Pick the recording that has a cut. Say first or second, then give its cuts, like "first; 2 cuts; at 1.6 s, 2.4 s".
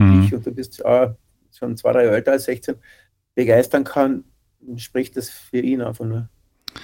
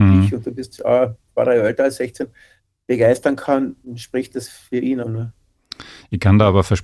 second; 3 cuts; at 1.4 s, 3.8 s, 5.0 s